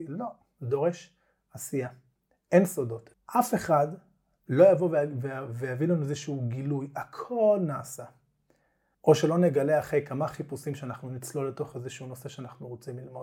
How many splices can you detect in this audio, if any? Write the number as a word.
two